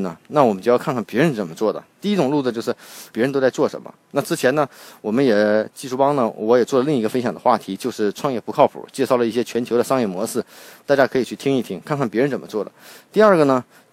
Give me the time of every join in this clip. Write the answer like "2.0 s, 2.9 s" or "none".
1.9 s, 3.1 s